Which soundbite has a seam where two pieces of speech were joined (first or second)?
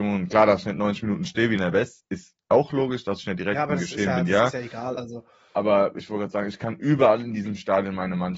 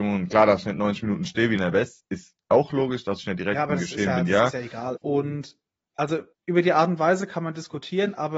second